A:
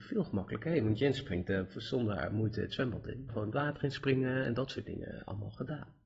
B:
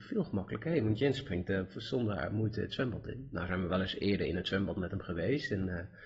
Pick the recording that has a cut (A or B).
A